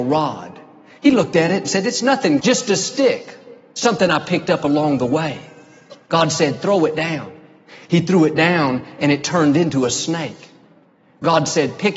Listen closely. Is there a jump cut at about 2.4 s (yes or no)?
yes